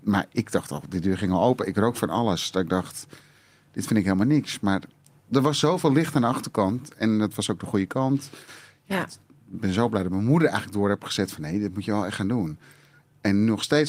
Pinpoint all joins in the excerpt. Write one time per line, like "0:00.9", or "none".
none

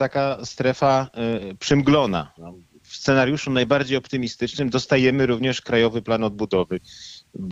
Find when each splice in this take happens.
0:02.4

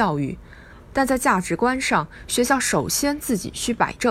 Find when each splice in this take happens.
0:00.9

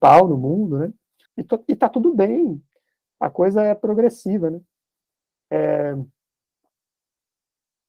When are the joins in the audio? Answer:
0:01.3

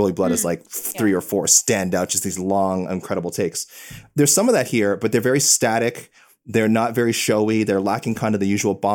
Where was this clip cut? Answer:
none

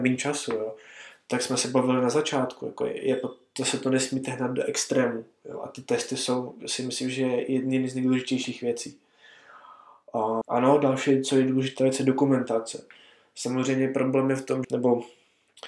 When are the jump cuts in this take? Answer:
0:10.4
0:14.6

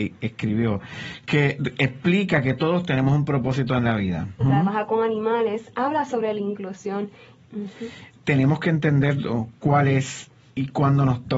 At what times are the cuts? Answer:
0:04.4
0:07.4

